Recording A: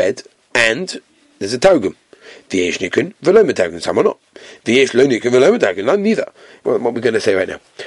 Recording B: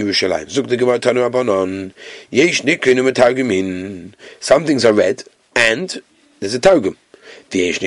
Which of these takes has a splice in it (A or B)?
A